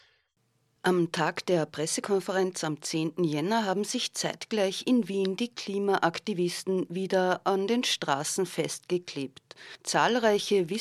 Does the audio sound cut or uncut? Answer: uncut